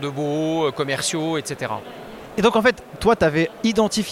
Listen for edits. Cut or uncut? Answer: cut